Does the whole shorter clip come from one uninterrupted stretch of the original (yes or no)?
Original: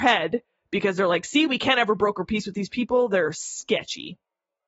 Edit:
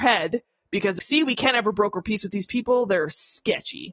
no